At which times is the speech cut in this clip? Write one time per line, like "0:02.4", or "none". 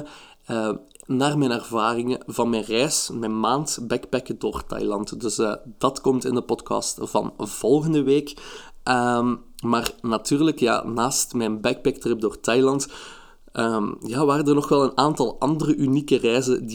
none